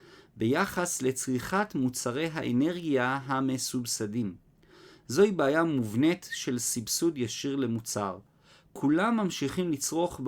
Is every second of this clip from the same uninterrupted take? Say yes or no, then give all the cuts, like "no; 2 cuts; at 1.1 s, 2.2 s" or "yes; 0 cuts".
yes; 0 cuts